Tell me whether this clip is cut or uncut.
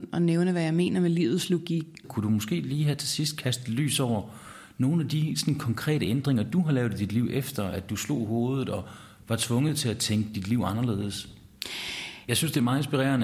cut